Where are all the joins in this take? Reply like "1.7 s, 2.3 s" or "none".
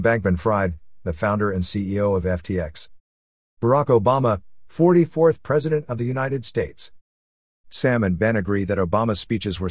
3.5 s